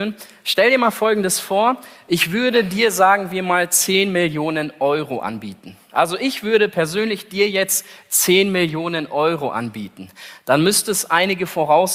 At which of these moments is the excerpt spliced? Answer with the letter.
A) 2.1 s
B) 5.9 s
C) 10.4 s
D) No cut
D